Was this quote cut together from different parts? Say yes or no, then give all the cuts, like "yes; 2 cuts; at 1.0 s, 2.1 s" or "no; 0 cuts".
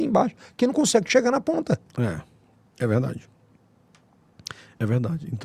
no; 0 cuts